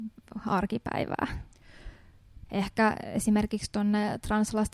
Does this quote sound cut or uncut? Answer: cut